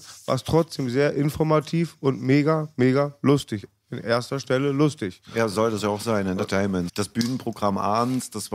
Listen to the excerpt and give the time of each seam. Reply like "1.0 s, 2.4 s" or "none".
6.9 s